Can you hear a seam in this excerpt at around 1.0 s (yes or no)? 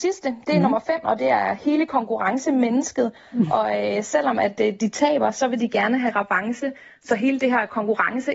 yes